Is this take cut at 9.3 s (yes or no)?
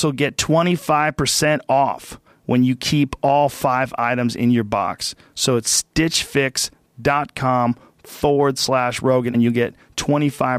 yes